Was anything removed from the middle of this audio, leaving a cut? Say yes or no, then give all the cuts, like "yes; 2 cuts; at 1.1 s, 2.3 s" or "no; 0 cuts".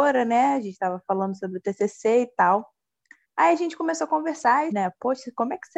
yes; 1 cut; at 4.7 s